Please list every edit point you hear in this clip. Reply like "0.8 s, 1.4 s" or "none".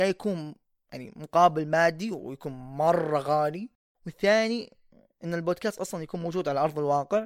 none